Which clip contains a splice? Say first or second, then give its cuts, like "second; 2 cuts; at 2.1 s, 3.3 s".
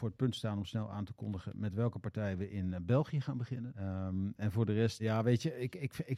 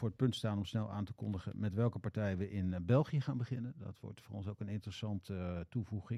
first; 2 cuts; at 3.7 s, 5.0 s